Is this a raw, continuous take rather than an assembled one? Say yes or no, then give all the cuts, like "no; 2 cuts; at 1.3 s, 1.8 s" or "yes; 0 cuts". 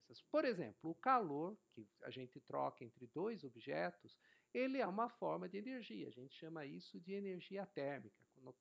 yes; 0 cuts